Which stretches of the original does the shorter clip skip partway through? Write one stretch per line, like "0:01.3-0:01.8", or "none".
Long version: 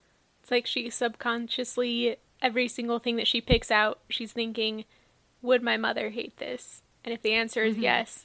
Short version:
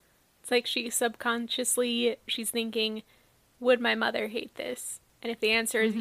0:02.2-0:04.0